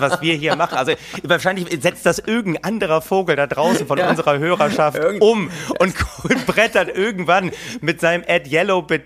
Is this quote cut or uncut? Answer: uncut